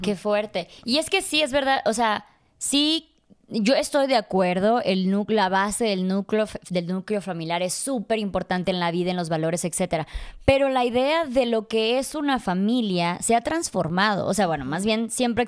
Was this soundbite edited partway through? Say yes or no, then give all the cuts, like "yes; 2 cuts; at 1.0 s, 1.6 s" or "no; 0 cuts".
no; 0 cuts